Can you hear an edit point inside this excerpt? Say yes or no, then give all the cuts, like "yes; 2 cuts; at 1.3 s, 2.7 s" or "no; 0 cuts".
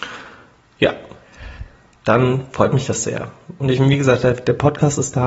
no; 0 cuts